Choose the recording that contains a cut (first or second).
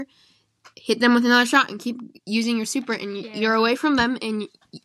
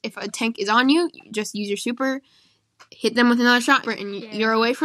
second